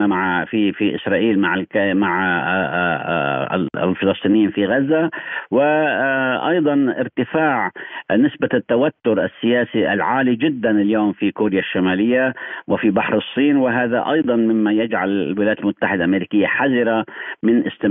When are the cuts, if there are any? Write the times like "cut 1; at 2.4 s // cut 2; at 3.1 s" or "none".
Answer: none